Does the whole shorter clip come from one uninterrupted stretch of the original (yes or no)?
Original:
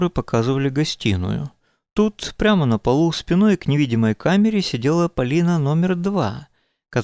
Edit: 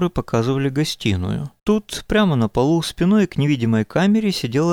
no